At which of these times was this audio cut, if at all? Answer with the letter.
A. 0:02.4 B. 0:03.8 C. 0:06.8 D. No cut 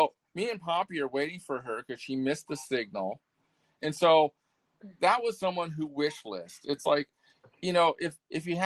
B